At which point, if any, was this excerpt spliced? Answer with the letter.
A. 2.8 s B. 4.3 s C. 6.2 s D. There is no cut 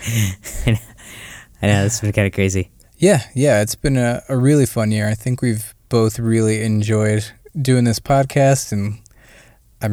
A